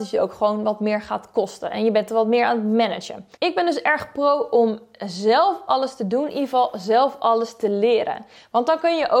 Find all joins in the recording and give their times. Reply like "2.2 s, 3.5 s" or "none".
3.4 s